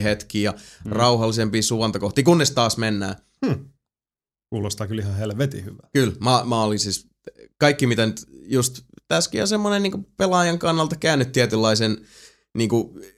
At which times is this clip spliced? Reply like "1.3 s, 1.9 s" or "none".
3.4 s